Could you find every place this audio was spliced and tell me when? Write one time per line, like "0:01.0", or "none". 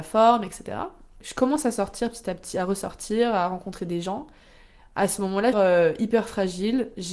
0:05.5